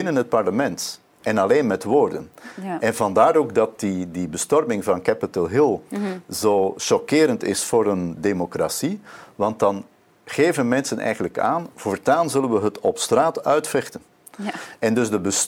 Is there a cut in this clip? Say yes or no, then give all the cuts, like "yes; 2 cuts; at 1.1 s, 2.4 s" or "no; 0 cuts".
no; 0 cuts